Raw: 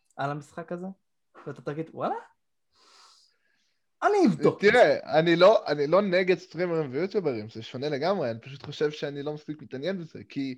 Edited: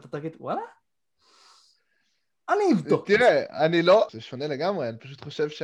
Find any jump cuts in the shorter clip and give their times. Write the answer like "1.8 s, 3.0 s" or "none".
4.1 s